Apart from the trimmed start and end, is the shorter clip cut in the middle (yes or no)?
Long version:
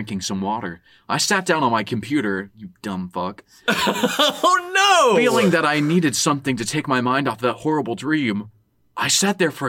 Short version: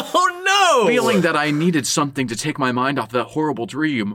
no